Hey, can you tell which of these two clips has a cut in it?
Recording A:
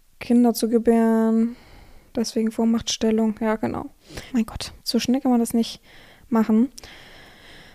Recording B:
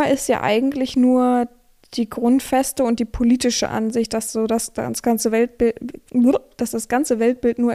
A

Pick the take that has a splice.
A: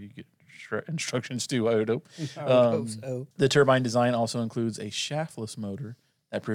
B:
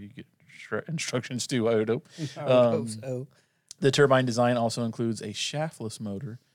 A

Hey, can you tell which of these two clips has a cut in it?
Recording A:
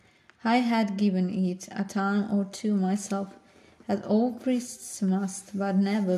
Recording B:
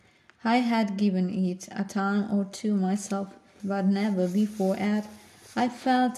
B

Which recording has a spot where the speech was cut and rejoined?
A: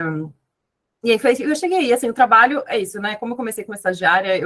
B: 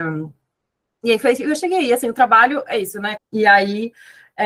B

